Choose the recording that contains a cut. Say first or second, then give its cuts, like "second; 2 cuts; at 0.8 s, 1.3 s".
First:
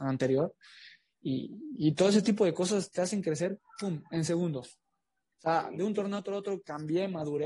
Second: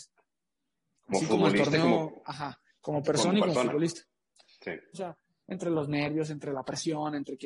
second; 1 cut; at 4.9 s